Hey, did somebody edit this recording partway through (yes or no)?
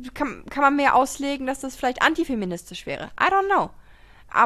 no